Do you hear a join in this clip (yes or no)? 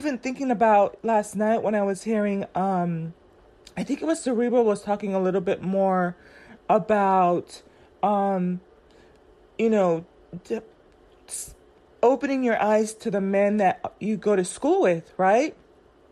no